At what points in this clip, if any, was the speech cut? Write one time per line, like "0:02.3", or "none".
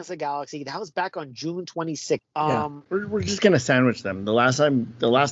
0:02.2